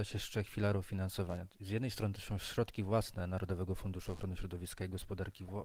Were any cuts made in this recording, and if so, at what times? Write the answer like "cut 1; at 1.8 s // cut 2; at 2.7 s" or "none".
none